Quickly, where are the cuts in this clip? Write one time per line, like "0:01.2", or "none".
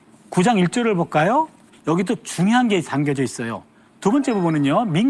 0:01.7
0:03.9